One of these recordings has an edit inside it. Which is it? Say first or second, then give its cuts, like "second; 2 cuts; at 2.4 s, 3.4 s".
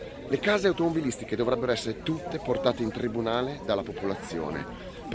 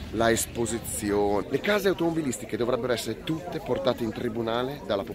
second; 1 cut; at 1.4 s